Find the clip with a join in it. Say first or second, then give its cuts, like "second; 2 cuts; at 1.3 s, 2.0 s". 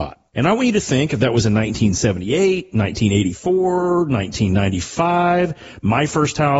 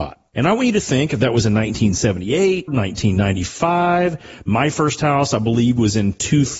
second; 1 cut; at 2.7 s